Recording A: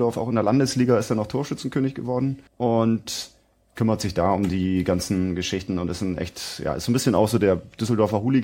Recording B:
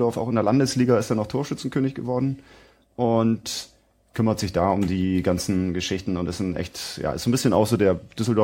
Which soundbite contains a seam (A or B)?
A